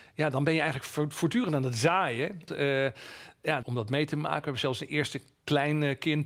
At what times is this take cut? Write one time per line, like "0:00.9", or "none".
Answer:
0:02.5
0:03.6